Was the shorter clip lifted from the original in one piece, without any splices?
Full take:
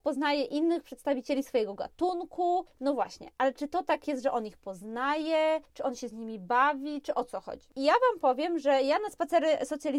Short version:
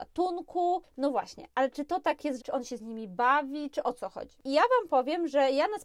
no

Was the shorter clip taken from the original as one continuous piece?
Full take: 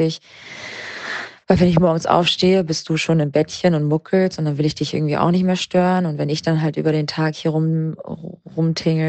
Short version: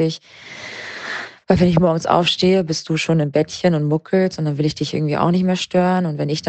yes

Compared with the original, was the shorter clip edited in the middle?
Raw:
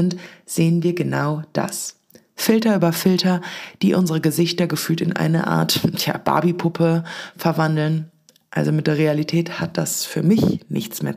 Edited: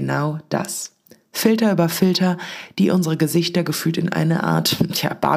no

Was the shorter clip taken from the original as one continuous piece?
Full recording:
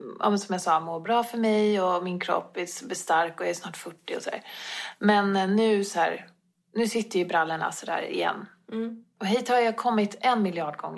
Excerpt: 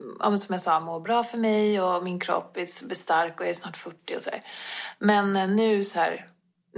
yes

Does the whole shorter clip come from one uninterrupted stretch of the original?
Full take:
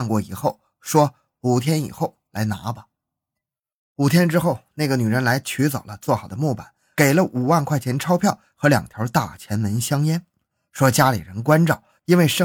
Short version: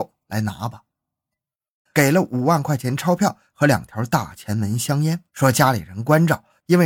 no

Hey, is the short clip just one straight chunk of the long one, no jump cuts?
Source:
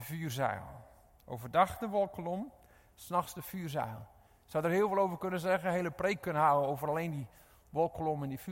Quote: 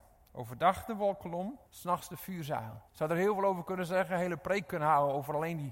no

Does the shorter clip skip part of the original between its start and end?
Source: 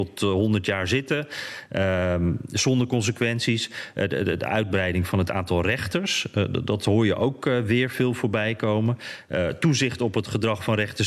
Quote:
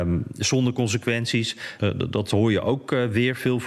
yes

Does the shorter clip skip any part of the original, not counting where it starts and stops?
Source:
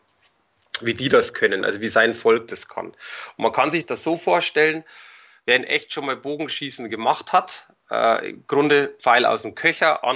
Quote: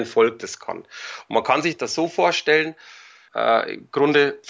yes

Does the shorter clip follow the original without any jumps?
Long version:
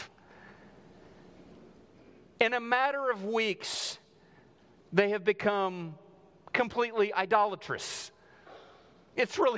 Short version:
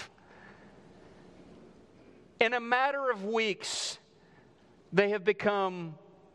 yes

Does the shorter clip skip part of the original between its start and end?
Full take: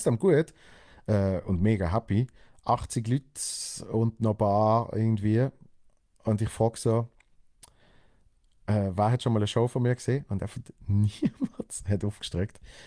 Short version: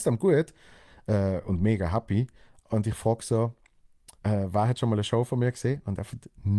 yes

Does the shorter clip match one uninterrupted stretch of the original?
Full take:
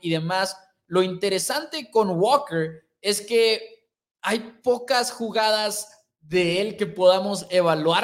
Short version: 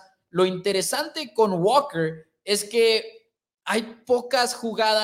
yes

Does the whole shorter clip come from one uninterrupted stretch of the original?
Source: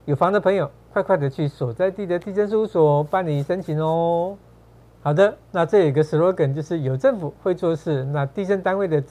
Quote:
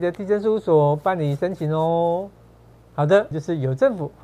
no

